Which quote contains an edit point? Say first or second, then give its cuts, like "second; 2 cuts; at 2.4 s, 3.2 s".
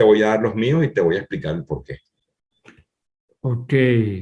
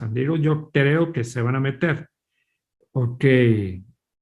second; 1 cut; at 2.8 s